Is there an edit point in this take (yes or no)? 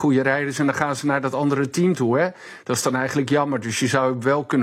no